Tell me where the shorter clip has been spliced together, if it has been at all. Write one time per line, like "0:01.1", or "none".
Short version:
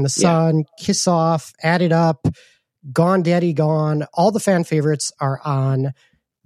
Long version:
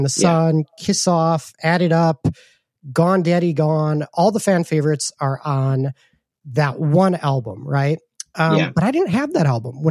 none